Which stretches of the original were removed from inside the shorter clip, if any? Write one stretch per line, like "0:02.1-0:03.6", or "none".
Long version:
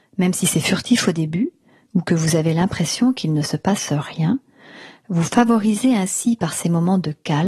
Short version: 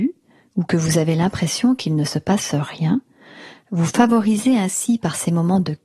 none